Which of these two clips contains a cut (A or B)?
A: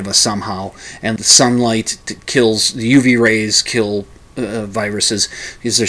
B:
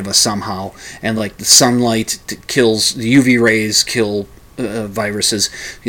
A